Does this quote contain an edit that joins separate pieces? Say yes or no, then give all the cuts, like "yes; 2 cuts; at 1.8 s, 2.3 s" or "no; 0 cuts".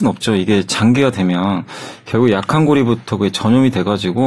no; 0 cuts